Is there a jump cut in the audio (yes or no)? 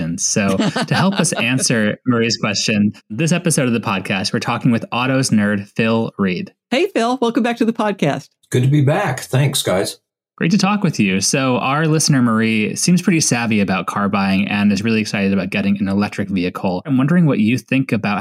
no